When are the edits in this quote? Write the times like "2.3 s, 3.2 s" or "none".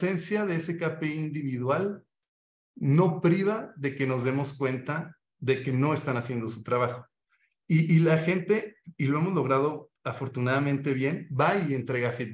none